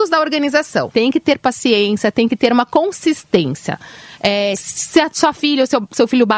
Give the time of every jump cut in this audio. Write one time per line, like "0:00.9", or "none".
0:00.9
0:04.5